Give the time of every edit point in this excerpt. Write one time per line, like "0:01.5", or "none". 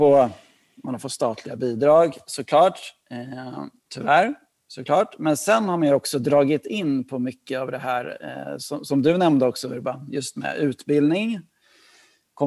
0:03.9